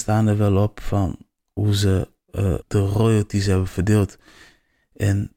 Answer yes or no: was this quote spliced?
yes